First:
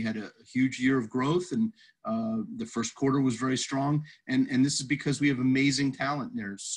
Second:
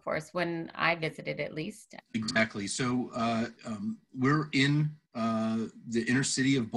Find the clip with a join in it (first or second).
second